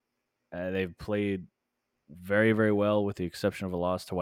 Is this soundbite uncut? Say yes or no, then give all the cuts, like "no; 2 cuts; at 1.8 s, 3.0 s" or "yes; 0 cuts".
yes; 0 cuts